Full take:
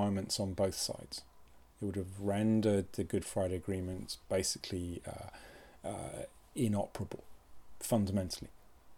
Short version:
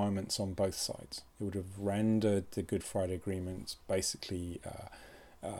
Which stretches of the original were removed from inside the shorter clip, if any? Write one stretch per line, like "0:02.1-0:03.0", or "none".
0:01.3-0:01.7